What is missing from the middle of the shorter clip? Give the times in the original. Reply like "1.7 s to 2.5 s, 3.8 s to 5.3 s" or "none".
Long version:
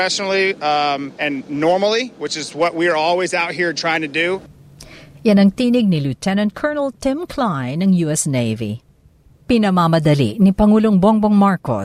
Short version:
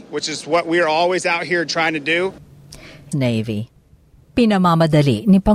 5.2 s to 8.2 s